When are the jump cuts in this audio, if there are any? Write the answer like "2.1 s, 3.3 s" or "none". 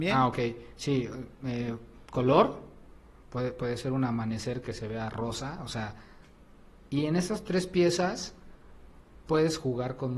none